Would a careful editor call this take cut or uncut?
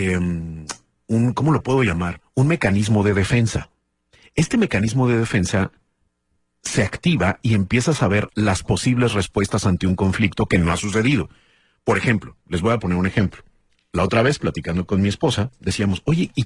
uncut